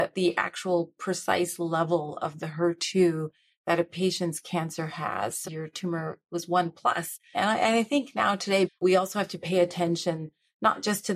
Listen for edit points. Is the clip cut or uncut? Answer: cut